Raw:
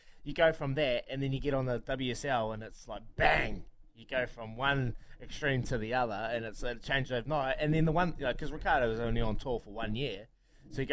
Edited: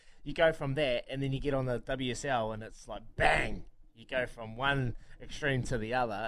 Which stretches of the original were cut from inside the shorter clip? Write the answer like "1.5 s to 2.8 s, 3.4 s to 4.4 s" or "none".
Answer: none